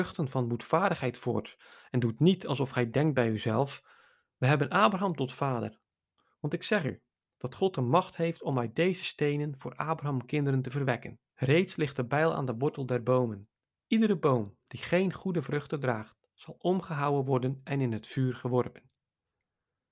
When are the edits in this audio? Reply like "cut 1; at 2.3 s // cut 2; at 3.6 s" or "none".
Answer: cut 1; at 11.3 s